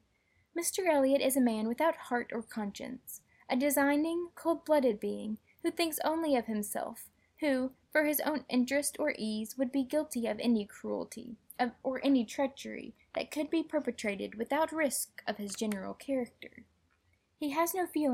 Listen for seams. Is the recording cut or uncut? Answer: cut